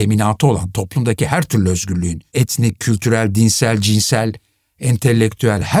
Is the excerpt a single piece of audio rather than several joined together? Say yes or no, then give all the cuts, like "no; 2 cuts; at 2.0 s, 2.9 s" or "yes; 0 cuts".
yes; 0 cuts